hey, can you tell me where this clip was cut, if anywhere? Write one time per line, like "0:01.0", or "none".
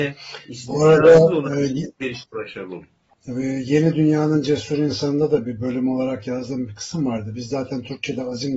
none